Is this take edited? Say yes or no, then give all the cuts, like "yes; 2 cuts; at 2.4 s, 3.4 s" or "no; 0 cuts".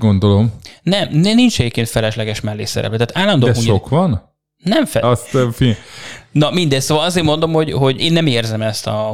yes; 2 cuts; at 5.0 s, 8.0 s